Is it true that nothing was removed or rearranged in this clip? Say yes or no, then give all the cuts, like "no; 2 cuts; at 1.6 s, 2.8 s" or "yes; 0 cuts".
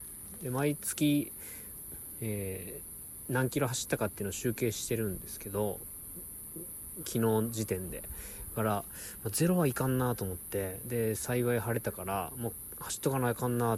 no; 1 cut; at 7.0 s